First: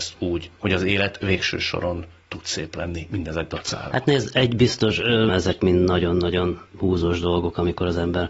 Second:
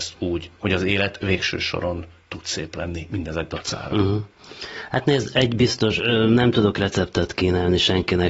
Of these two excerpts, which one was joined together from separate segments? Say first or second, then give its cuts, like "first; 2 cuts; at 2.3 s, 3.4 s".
first; 2 cuts; at 3.9 s, 5.3 s